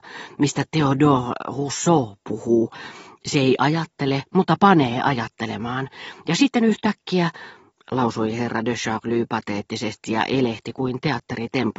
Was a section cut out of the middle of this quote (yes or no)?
no